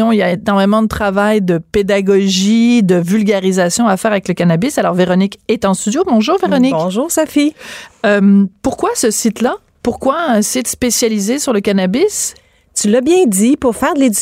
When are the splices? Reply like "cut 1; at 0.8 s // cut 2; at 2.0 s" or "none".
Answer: none